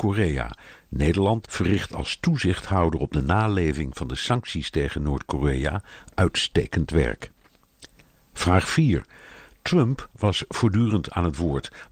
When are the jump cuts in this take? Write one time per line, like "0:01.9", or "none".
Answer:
0:01.4